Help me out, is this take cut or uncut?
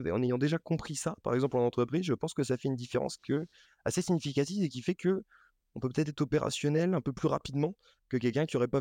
uncut